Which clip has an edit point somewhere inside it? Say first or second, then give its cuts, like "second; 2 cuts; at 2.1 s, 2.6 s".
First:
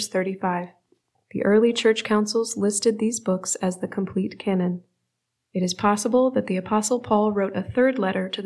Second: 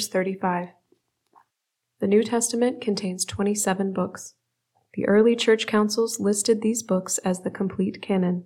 first; 2 cuts; at 1.1 s, 5.4 s